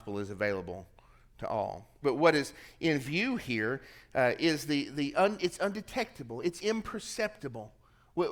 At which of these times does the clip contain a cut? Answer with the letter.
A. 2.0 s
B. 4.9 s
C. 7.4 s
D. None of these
A